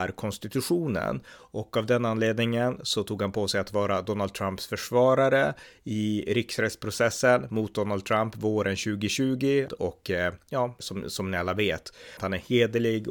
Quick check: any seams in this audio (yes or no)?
yes